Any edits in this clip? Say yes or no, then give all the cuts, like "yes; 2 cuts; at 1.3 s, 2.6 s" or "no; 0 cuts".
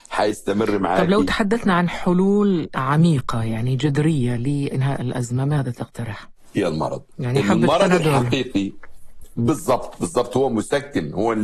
yes; 1 cut; at 6.5 s